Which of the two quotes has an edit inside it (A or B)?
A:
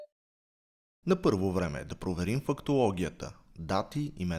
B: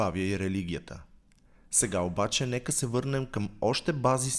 A